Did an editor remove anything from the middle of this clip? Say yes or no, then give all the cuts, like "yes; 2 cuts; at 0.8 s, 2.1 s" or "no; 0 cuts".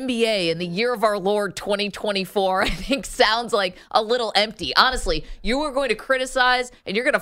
no; 0 cuts